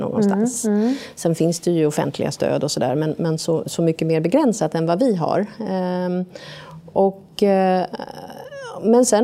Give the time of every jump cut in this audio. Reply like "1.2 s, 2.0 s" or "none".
none